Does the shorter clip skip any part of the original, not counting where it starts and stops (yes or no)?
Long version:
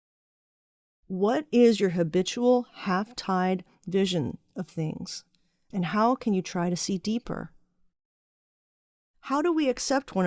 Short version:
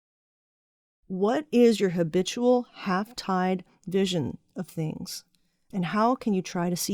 no